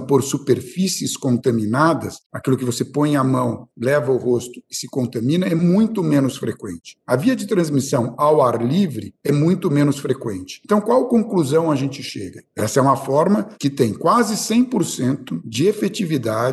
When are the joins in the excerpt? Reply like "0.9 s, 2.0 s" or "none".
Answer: 12.5 s